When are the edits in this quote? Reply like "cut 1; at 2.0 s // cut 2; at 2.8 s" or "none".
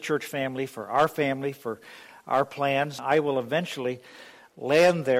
cut 1; at 3.0 s